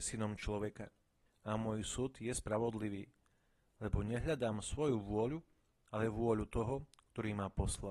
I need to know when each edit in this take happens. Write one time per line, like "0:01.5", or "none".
0:01.3